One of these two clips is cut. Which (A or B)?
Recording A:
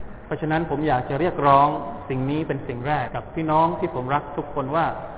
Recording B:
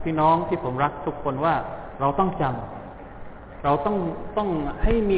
A